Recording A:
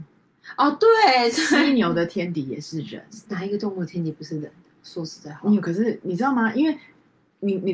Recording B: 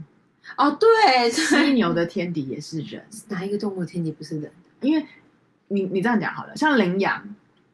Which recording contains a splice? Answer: B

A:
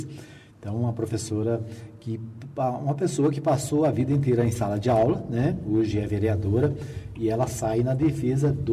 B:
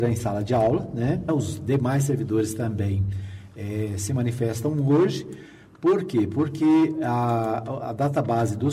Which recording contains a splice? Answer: B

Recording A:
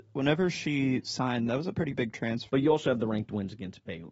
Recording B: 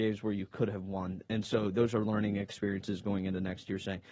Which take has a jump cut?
A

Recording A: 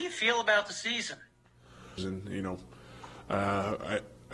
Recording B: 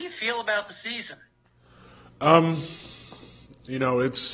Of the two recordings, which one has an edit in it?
A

